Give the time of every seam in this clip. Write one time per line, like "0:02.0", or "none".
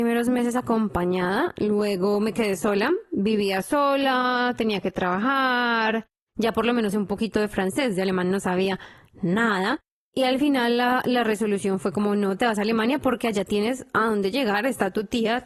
0:06.3